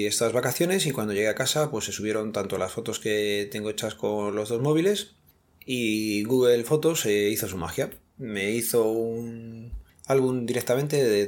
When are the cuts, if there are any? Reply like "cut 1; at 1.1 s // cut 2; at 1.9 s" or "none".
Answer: none